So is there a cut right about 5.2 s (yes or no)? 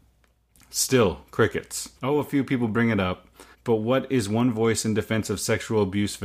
no